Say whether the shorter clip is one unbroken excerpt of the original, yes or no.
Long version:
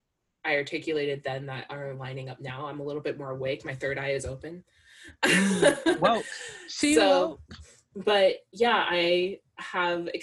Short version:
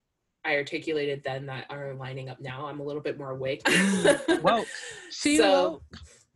no